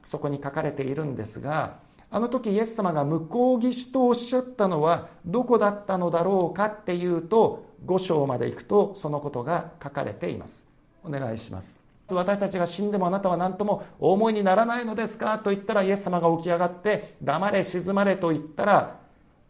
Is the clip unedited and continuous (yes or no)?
no